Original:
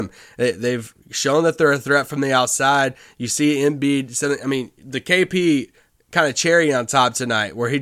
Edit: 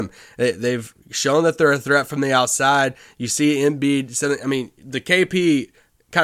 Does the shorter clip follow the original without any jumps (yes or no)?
yes